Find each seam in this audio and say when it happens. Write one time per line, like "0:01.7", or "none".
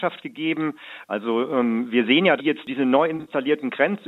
0:01.1
0:02.4